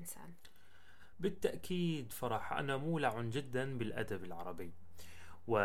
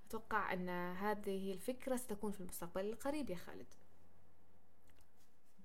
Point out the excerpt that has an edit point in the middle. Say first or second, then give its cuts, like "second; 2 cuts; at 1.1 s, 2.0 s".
first; 1 cut; at 1.1 s